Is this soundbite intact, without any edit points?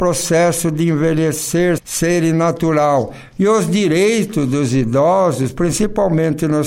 no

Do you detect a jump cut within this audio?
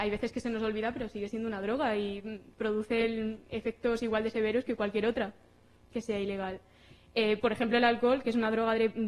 no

